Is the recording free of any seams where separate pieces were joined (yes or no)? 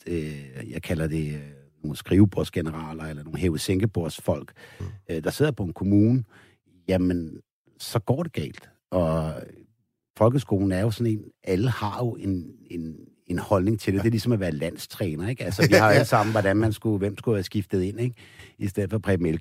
yes